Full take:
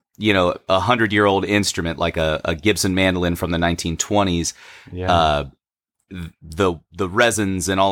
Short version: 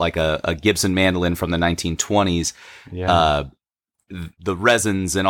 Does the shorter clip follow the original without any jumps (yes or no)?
no